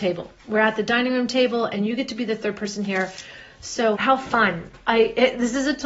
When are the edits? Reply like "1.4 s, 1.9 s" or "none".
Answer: 3.9 s